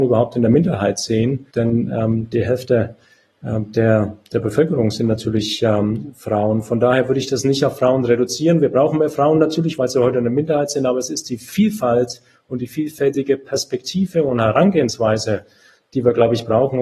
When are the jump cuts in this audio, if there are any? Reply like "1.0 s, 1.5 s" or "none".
1.5 s